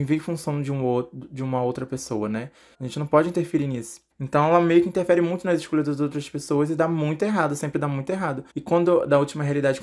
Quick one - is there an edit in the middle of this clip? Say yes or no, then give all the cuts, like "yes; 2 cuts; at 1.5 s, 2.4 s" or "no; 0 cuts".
yes; 3 cuts; at 2.7 s, 4.1 s, 8.5 s